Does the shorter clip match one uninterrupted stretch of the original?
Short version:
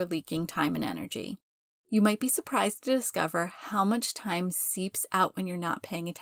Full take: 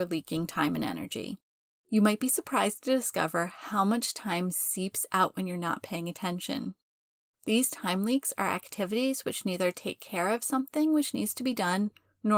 yes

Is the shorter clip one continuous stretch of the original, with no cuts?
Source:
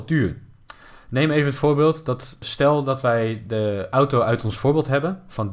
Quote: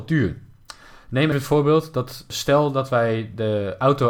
no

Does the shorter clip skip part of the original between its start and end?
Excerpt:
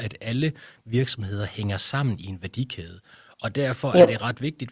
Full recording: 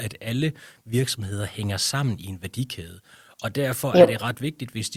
no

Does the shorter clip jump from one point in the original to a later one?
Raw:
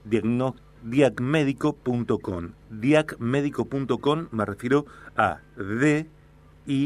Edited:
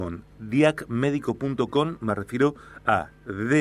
no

